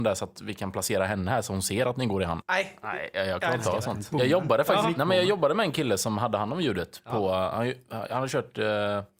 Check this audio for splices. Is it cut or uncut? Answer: cut